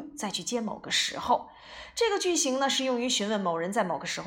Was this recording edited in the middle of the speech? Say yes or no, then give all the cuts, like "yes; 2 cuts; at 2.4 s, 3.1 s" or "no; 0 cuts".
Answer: no; 0 cuts